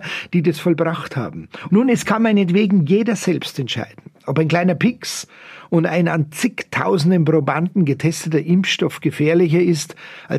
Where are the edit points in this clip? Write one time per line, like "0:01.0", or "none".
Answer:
0:01.7